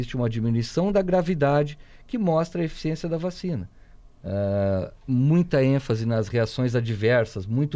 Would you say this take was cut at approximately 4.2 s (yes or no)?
yes